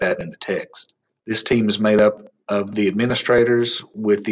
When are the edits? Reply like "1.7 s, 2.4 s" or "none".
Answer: 1.2 s